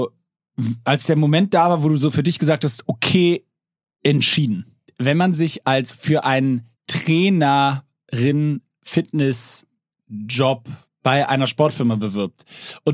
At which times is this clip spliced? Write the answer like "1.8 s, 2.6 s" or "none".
4.9 s, 6.8 s